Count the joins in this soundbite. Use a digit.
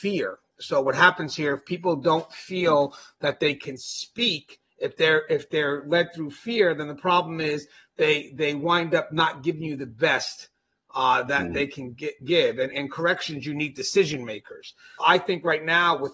2